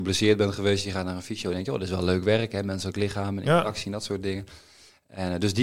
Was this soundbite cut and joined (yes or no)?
no